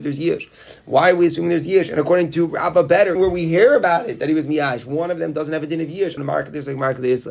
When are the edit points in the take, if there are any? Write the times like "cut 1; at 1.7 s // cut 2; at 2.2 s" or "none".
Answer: cut 1; at 3.2 s // cut 2; at 6.2 s